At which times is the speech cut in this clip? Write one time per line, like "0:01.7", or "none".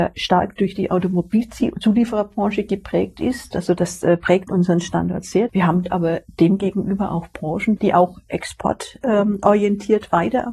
0:03.5
0:05.5
0:07.8